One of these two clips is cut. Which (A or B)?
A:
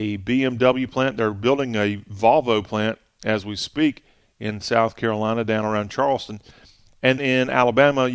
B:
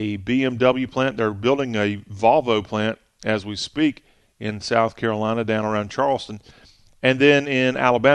A